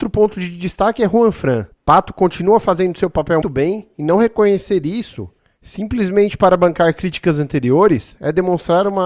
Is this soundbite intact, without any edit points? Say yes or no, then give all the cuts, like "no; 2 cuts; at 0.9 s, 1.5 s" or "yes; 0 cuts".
no; 2 cuts; at 1.7 s, 3.4 s